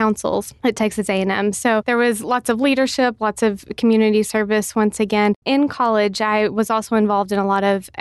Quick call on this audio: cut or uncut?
cut